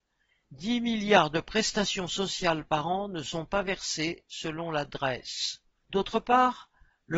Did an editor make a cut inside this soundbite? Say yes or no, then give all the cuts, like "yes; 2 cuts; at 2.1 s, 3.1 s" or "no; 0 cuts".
yes; 1 cut; at 5.8 s